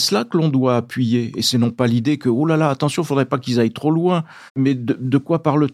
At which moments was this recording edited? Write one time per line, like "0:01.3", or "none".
0:04.5